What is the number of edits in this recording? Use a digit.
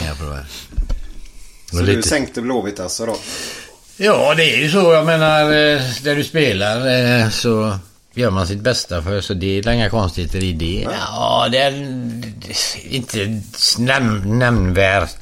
1